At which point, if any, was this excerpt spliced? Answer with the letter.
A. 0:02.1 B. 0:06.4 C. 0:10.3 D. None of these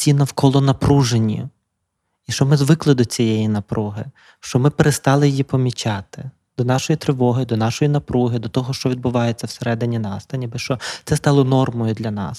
D